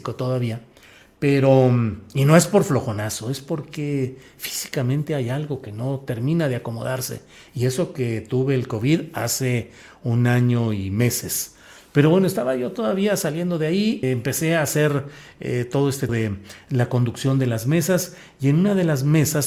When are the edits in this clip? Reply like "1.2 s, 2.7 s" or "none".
14.0 s, 16.1 s